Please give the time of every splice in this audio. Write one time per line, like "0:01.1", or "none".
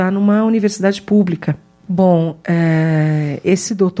0:01.8